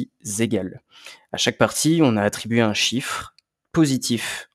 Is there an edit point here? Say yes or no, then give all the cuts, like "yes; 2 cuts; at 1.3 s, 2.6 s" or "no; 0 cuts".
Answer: no; 0 cuts